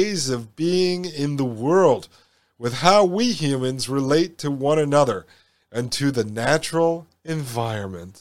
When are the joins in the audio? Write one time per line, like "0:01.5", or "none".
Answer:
none

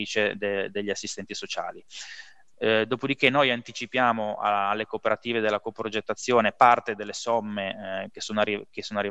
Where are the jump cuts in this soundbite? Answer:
none

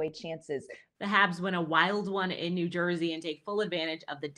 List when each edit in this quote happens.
0:00.9

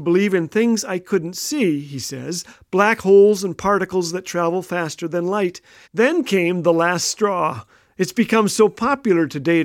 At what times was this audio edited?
0:05.8

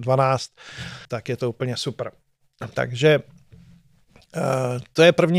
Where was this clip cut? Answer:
0:01.1
0:02.7

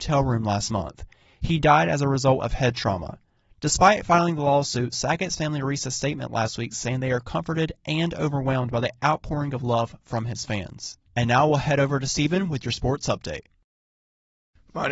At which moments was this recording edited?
0:11.1

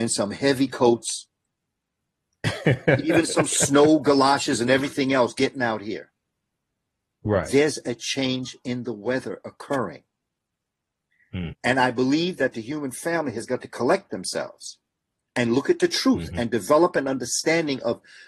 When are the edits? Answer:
0:11.5

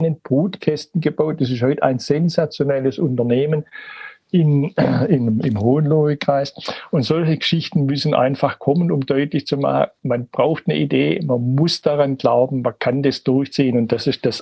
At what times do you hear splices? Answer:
none

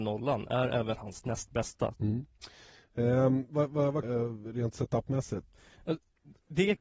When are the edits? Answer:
0:01.9
0:04.0

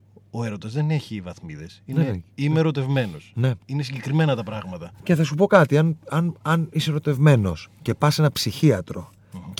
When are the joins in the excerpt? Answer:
none

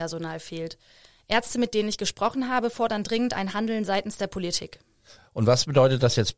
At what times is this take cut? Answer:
none

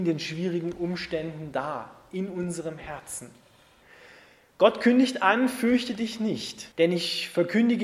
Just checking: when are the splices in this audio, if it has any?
0:06.7

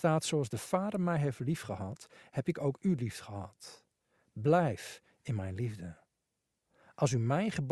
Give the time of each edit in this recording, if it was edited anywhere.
none

